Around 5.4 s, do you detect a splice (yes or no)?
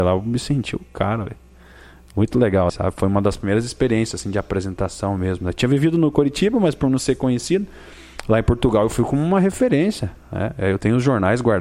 no